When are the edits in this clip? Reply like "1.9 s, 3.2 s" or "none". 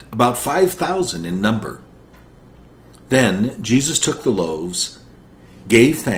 none